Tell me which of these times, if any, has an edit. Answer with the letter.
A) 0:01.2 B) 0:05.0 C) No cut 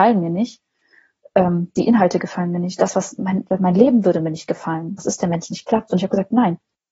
B